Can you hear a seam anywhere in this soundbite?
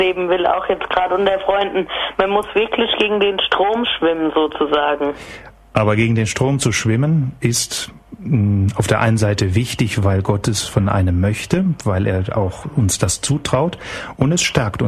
no; 0 cuts

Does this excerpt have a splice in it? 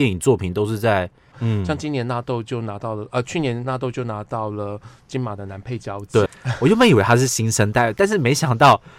yes; 2 cuts; at 1.3 s, 6.3 s

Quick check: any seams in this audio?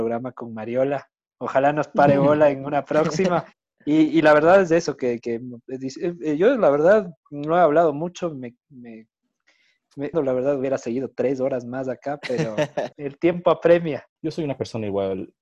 yes; 3 cuts; at 10.1 s, 12.9 s, 14.2 s

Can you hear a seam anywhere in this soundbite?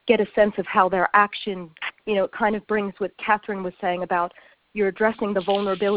no; 0 cuts

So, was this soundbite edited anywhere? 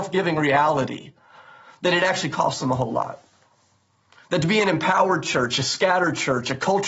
no; 0 cuts

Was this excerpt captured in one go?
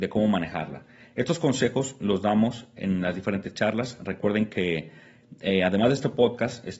yes; 0 cuts

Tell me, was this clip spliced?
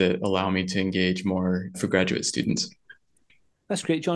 yes; 1 cut; at 1.7 s

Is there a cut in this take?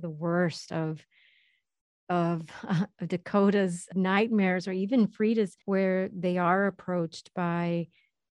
yes; 2 cuts; at 3.9 s, 5.6 s

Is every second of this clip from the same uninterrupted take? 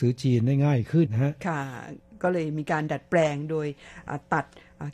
no; 1 cut; at 1.1 s

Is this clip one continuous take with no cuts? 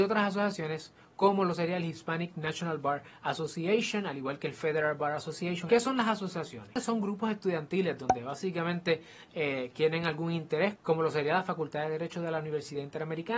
no; 1 cut; at 5.7 s

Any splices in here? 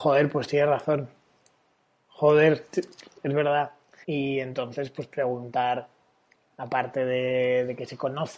yes; 1 cut; at 4.0 s

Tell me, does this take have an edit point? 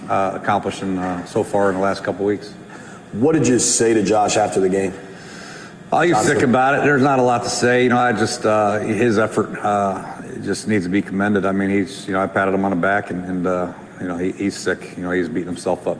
no; 0 cuts

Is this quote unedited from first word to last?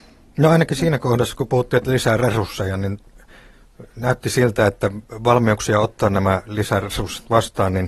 yes; 0 cuts

